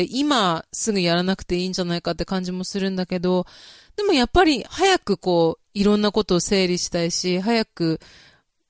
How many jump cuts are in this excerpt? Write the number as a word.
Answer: one